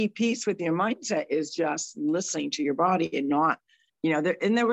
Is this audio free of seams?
yes; 0 cuts

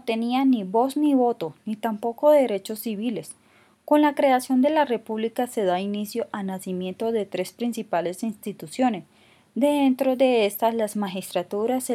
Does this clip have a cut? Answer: no; 0 cuts

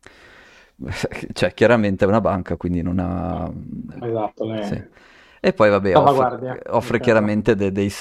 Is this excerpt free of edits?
no; 1 cut; at 4.0 s

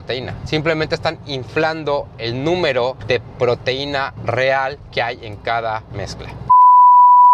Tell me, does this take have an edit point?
no; 0 cuts

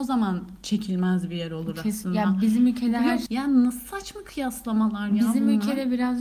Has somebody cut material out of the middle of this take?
yes; 1 cut; at 3.3 s

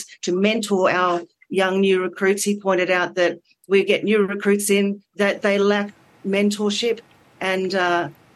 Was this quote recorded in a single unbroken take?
no; 1 cut; at 5.1 s

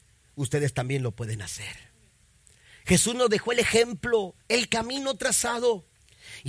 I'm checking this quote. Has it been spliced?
no; 0 cuts

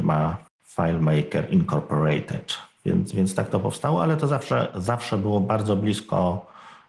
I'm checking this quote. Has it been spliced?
no; 0 cuts

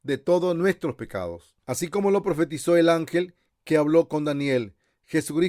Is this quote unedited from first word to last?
no; 1 cut; at 1.6 s

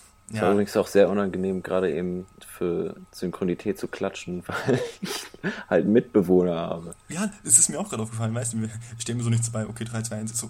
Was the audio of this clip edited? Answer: no; 0 cuts

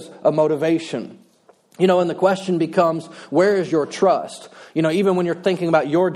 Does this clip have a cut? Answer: no; 0 cuts

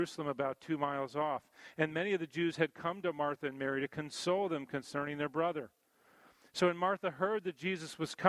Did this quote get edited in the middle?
no; 0 cuts

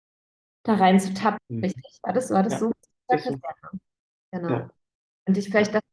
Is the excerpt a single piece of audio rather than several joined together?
no; 1 cut; at 1.4 s

